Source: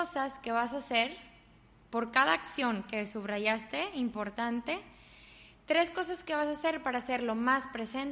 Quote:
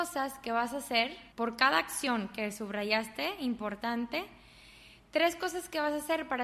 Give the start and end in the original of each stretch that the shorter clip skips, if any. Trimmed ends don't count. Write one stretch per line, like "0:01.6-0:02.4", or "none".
0:01.3-0:01.9